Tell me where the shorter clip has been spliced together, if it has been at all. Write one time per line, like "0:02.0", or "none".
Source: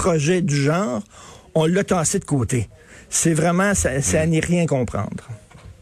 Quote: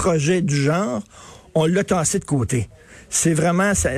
none